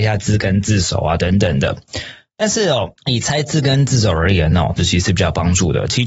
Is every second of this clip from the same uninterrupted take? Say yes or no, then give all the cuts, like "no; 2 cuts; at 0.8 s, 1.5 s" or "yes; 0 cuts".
no; 2 cuts; at 3.0 s, 4.8 s